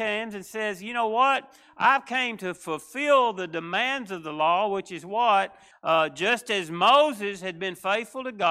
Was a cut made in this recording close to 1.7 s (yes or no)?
no